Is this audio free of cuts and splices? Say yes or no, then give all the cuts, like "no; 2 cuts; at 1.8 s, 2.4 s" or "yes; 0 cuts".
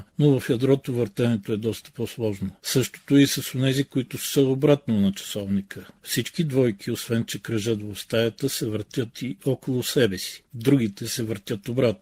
no; 3 cuts; at 2.6 s, 6.0 s, 10.4 s